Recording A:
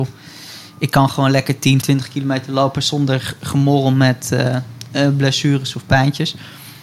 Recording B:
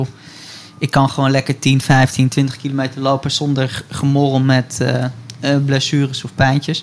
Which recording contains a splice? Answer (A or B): A